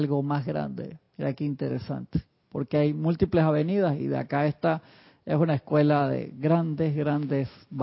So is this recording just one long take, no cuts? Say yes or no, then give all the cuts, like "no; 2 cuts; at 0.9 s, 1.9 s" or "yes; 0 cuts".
yes; 0 cuts